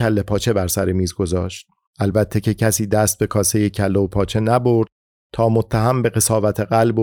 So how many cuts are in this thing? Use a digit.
1